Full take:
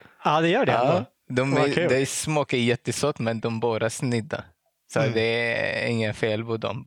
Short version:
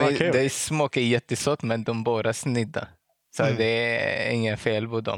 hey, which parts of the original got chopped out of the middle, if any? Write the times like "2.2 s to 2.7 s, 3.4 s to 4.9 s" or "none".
none

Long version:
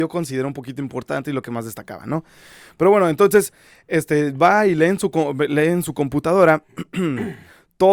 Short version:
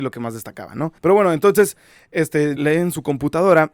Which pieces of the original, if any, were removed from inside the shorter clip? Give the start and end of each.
2.3 s to 2.7 s, 4.3 s to 5.5 s

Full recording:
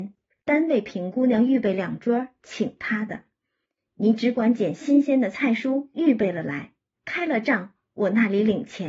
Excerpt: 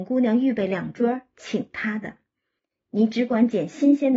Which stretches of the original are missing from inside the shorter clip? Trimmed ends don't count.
none

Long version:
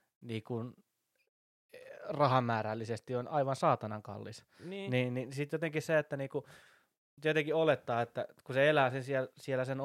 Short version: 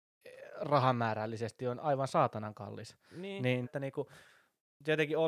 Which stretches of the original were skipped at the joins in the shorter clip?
5.1 s to 6.0 s

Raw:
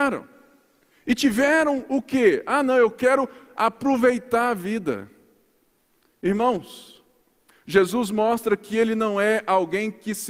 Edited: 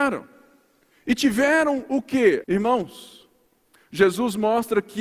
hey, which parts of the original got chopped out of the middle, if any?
2.4 s to 6.2 s

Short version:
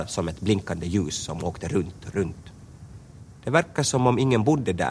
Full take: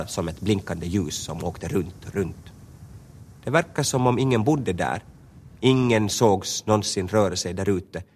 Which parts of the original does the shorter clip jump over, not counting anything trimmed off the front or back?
none

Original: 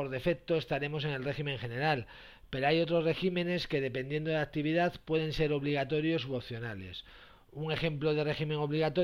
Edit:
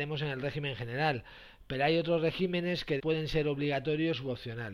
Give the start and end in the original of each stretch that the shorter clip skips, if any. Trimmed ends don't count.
3.8 s to 5.0 s

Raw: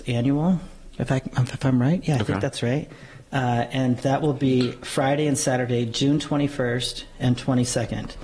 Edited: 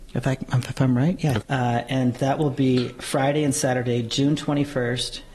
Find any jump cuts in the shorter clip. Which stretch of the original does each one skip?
2.3 s to 3.2 s

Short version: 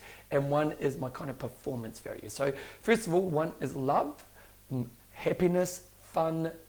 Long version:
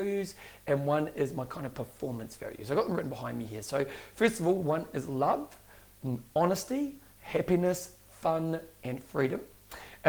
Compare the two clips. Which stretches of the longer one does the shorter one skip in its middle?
2.6 s to 3.6 s, 6.3 s to 7.1 s

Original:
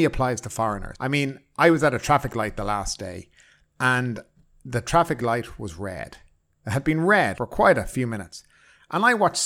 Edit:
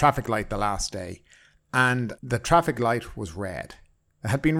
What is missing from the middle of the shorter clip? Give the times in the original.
4.2 s to 4.6 s

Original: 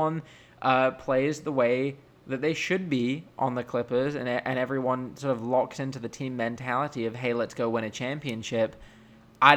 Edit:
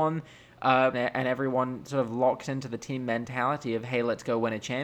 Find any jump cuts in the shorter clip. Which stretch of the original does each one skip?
0.9 s to 4.2 s

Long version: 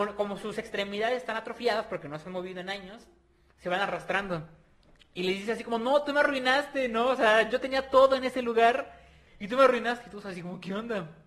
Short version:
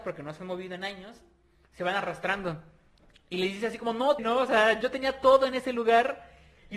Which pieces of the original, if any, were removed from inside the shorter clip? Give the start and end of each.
6.0 s to 6.9 s

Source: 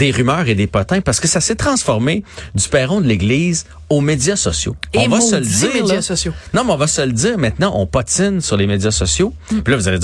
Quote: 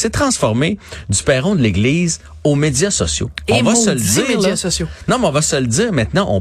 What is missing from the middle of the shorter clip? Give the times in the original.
none

